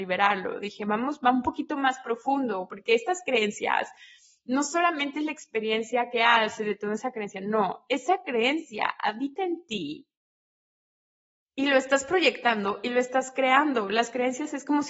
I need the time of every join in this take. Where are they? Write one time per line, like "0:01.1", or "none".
none